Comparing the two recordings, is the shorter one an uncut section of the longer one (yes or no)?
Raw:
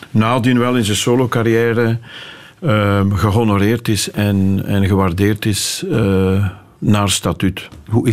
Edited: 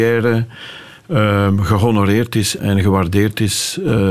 no